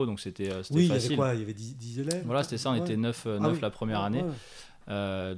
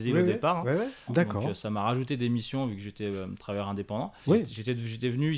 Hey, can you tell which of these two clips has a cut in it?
second; 2 cuts; at 1.1 s, 4.2 s

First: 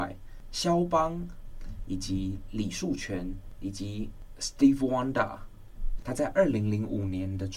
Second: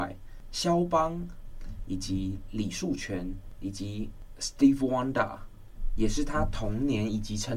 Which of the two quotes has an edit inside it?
first; 1 cut; at 6.0 s

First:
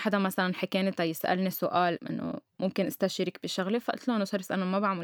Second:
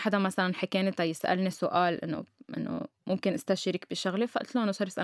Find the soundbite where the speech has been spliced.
first; 1 cut; at 2.0 s

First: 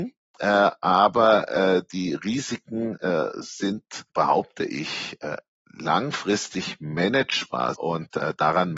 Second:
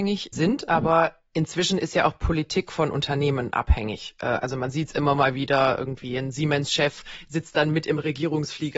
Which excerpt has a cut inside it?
first; 2 cuts; at 4.1 s, 7.7 s

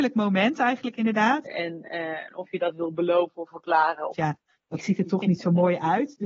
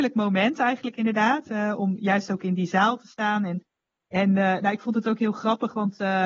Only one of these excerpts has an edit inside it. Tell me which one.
first; 2 cuts; at 1.5 s, 4.1 s

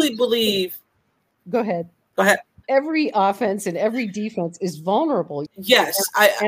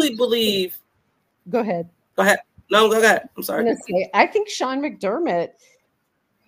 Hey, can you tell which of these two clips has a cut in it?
first; 2 cuts; at 2.6 s, 5.5 s

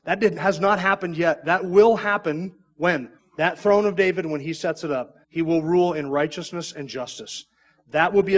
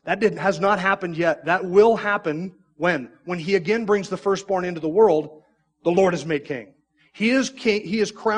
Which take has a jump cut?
first; 2 cuts; at 3.2 s, 5.2 s

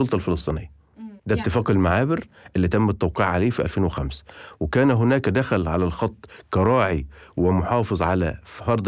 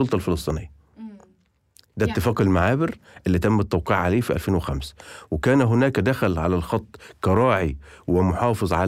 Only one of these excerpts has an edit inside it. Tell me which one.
first; 1 cut; at 1.2 s

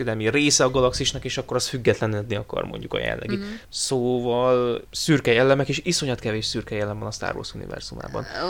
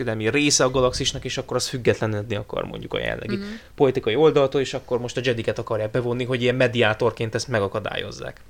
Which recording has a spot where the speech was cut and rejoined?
first; 2 cuts; at 3.6 s, 4.8 s

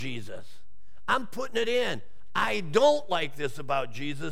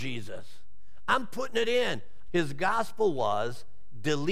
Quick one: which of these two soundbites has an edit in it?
second; 1 cut; at 2.3 s

